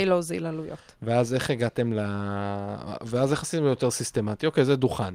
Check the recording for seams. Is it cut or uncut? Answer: uncut